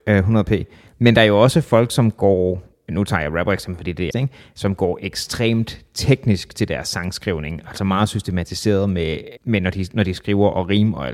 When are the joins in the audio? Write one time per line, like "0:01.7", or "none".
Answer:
0:04.1
0:09.4